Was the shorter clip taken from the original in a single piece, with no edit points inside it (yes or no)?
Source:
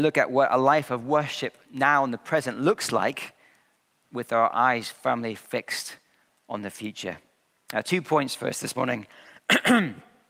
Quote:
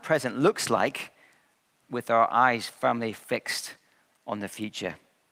yes